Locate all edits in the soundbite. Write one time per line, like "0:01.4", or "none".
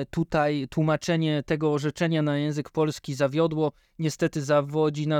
none